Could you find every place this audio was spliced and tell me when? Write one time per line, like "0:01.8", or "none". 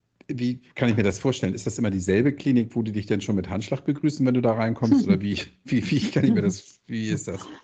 none